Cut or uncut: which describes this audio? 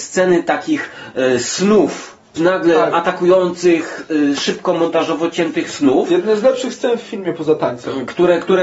cut